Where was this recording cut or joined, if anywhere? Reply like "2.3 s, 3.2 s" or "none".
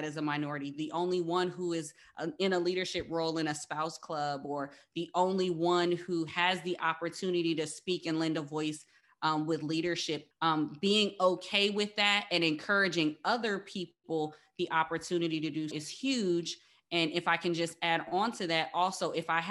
10.3 s, 15.7 s

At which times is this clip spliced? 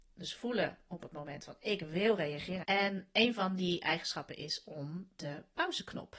2.6 s

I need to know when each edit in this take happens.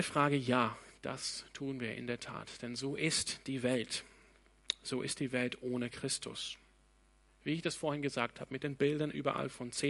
7.3 s

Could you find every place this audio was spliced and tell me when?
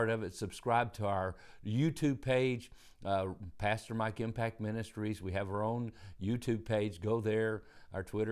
none

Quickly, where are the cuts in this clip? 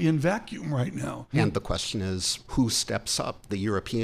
1.3 s, 2.4 s

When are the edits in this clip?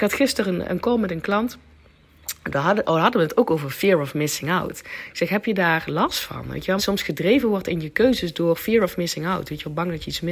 6.8 s

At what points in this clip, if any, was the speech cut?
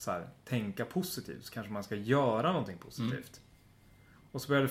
none

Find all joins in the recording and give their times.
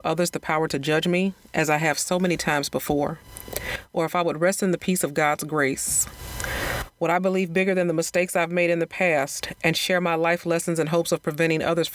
none

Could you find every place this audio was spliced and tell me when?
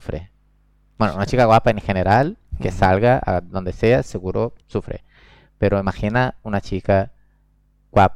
4.6 s

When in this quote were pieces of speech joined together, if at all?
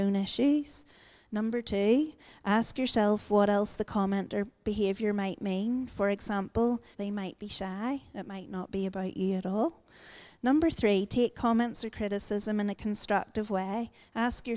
6.9 s

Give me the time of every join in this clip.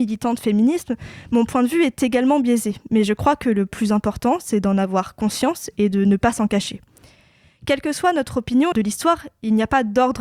8.7 s

